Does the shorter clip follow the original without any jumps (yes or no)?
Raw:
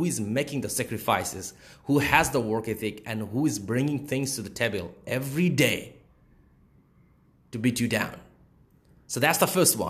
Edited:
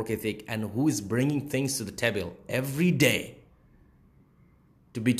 yes